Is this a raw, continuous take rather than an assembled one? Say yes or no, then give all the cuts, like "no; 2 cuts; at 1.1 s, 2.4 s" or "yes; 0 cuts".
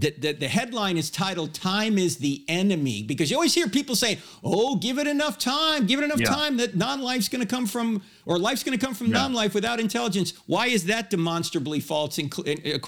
yes; 0 cuts